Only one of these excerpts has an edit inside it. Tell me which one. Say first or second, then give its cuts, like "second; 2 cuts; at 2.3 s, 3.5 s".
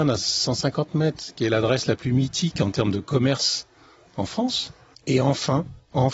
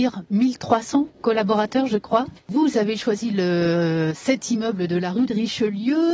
first; 1 cut; at 4.9 s